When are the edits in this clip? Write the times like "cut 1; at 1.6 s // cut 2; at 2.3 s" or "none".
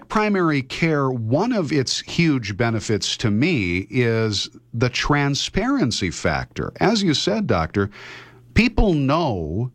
none

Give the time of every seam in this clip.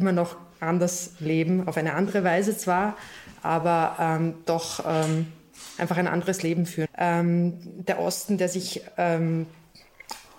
cut 1; at 6.9 s

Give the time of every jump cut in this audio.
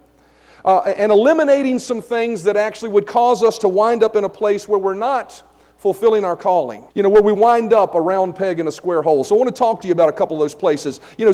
cut 1; at 6.9 s

